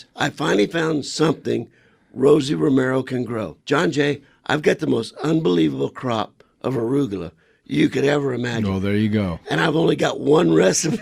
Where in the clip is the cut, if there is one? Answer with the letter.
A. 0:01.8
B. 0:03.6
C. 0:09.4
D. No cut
B